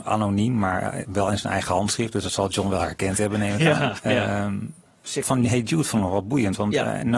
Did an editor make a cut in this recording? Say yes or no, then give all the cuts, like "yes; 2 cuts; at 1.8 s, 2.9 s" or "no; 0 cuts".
yes; 2 cuts; at 4.0 s, 5.2 s